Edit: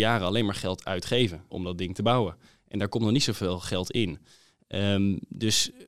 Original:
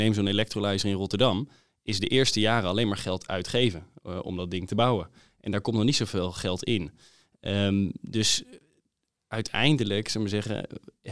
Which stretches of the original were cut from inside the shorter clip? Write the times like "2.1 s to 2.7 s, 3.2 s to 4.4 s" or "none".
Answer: 3.9 s to 4.2 s